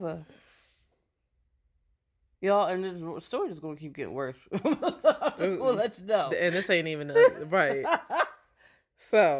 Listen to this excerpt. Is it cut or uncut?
uncut